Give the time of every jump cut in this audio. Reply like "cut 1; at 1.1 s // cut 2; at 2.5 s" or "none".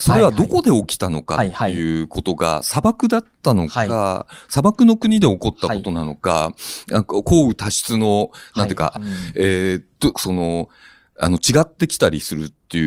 cut 1; at 9.0 s // cut 2; at 10.1 s